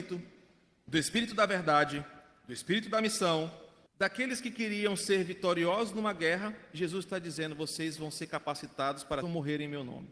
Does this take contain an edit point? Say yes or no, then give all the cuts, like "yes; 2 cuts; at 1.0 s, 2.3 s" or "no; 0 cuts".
yes; 2 cuts; at 3.9 s, 9.2 s